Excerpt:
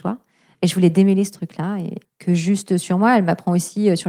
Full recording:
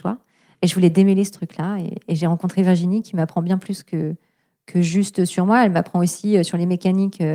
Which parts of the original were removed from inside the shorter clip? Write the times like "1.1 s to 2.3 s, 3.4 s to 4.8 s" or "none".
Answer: 2.0 s to 4.5 s